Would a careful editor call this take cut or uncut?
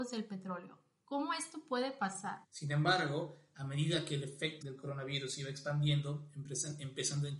cut